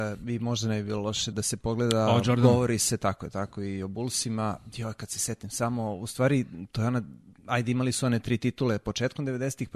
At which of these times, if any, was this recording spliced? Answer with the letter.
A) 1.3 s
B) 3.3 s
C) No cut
A